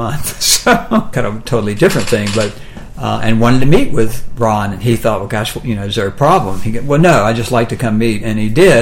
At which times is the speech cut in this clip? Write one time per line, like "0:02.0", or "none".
0:01.1